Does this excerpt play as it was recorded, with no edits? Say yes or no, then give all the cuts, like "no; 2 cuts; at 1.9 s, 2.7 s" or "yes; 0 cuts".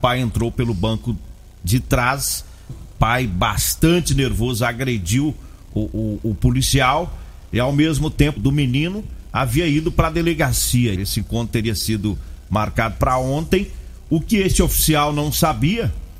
no; 3 cuts; at 2.7 s, 8.4 s, 11.0 s